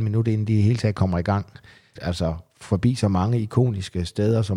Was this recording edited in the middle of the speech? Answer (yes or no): yes